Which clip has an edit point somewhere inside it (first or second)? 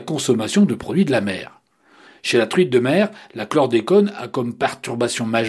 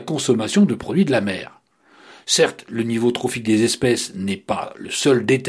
first